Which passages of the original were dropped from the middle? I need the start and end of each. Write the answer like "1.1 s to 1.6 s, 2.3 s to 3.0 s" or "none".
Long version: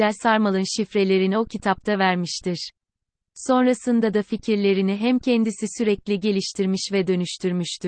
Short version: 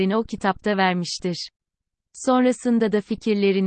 none